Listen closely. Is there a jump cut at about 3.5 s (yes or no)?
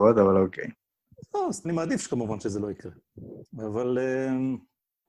no